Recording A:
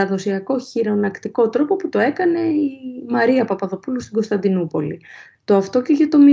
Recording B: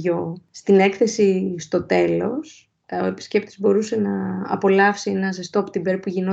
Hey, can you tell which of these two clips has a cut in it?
A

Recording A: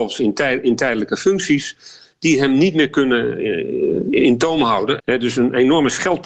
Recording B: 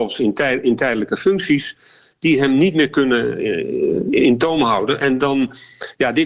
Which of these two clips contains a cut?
A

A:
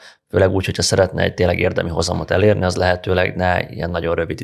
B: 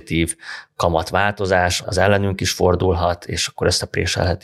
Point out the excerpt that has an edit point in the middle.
B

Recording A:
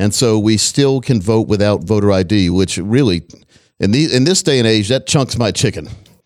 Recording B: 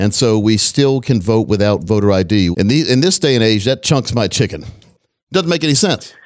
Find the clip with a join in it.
B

